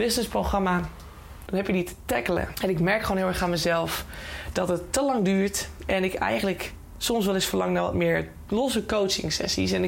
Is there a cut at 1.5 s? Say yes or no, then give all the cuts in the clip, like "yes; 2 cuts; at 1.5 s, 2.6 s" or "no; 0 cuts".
yes; 2 cuts; at 1.5 s, 2.5 s